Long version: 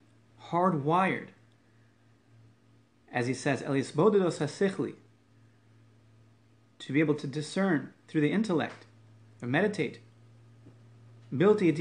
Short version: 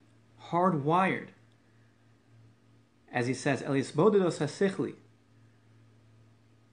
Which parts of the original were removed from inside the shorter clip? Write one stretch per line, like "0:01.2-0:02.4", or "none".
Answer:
none